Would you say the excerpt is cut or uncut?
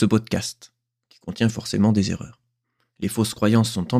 cut